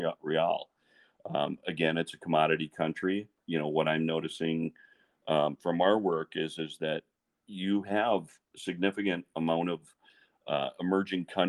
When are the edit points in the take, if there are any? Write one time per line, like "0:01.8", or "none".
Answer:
none